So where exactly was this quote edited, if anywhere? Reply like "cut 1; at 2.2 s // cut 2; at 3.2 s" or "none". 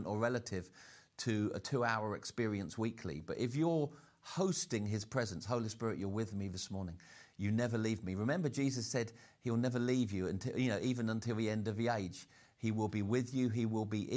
none